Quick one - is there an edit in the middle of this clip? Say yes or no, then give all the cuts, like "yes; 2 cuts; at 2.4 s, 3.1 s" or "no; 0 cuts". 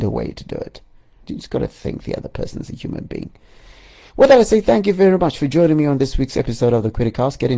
yes; 1 cut; at 1.2 s